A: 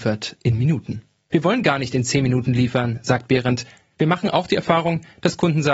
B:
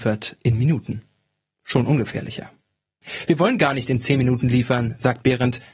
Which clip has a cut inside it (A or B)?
A